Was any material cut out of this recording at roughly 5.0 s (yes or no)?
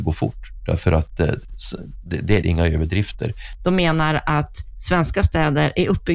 no